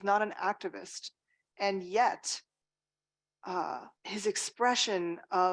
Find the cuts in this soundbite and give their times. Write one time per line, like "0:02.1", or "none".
0:04.0